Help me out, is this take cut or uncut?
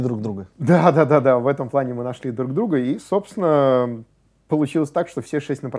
uncut